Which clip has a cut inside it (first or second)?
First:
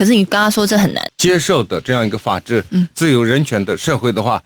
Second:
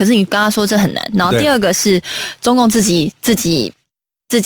first